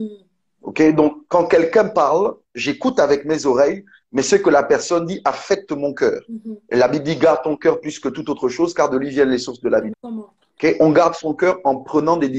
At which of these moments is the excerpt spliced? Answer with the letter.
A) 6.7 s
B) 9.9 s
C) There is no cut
B